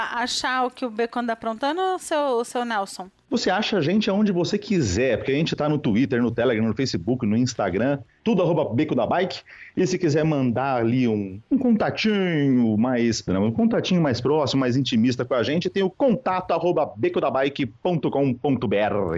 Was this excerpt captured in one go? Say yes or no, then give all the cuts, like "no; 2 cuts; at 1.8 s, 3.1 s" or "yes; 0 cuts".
no; 1 cut; at 13.3 s